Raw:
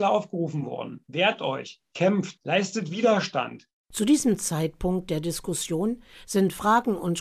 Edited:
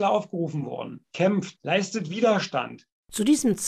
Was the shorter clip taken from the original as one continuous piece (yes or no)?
no